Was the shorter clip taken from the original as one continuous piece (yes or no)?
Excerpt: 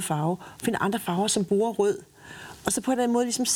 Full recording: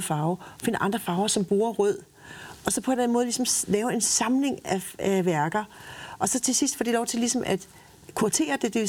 yes